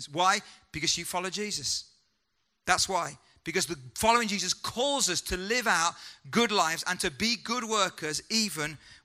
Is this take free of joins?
yes; 0 cuts

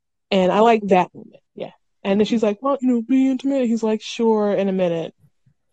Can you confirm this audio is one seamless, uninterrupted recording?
no; 2 cuts; at 1.5 s, 2.8 s

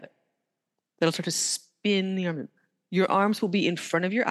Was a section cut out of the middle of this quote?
no; 0 cuts

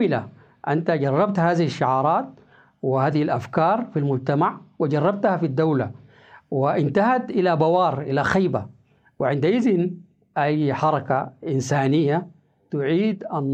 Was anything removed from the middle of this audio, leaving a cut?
no; 0 cuts

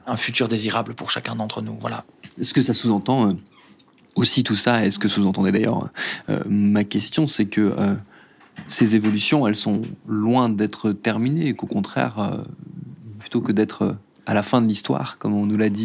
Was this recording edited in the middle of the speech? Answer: no; 0 cuts

